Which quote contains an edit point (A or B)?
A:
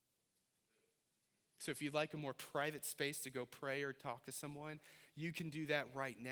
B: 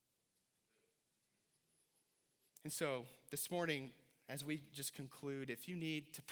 A